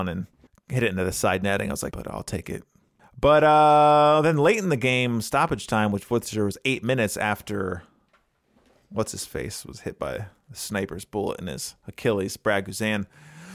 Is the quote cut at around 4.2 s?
no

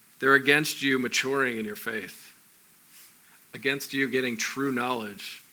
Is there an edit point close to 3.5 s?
no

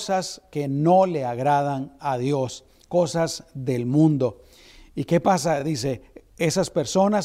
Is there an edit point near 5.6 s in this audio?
no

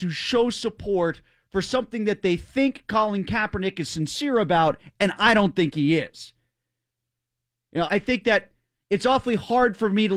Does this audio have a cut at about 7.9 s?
yes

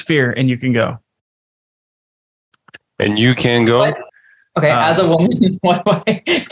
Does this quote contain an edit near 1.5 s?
no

